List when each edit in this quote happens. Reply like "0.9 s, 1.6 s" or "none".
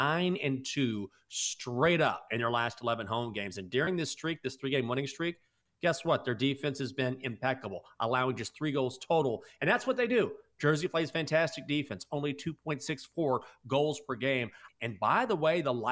14.7 s